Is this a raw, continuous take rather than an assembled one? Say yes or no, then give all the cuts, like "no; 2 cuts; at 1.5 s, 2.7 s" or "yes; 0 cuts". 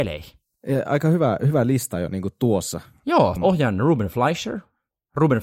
no; 1 cut; at 3.4 s